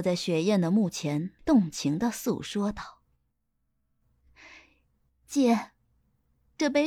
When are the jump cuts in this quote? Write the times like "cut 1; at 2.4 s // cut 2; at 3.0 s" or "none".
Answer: cut 1; at 1.4 s